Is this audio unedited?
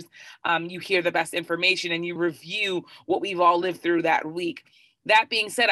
no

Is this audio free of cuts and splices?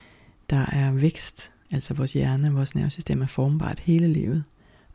no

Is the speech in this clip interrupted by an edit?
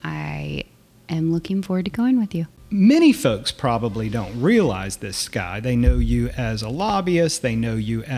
no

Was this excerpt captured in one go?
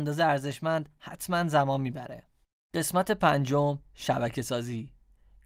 yes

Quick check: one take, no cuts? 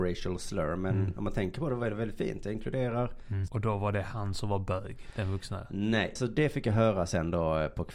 no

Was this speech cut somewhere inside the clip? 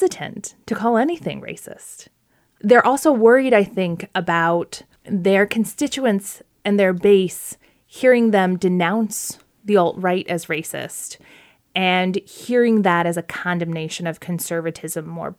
no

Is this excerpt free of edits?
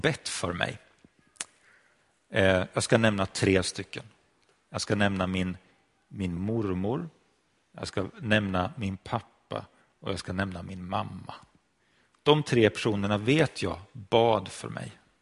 yes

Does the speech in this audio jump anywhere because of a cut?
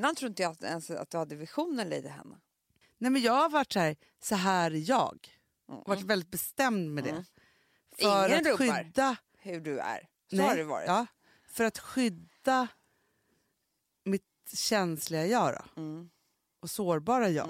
yes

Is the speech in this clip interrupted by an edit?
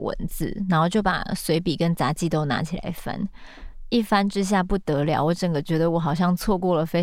no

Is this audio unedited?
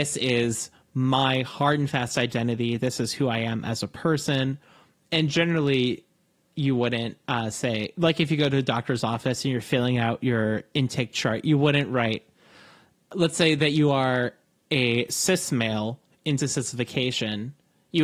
yes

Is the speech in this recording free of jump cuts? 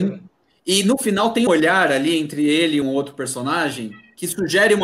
no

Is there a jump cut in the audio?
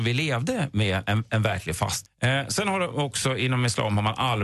yes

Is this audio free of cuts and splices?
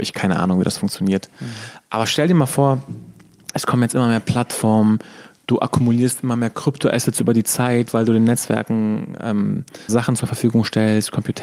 no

